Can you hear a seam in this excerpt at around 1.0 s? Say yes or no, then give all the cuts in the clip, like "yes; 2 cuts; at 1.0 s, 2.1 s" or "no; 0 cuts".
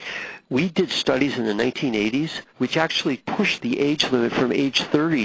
no; 2 cuts; at 2.5 s, 3.6 s